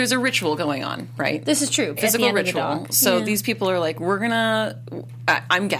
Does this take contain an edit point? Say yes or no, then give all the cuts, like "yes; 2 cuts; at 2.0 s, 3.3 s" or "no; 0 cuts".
yes; 1 cut; at 2.0 s